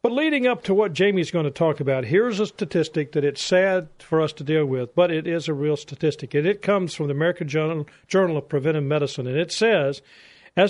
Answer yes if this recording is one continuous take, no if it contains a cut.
yes